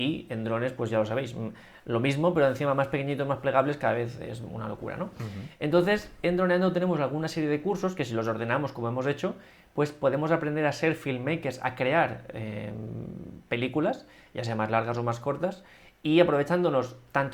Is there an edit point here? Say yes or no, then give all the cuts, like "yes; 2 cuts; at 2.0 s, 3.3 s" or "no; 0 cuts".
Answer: no; 0 cuts